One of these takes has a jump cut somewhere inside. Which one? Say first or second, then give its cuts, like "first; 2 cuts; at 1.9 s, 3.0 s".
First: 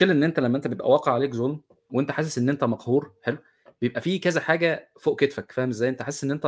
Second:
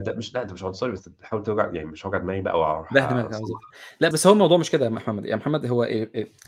second; 1 cut; at 4.1 s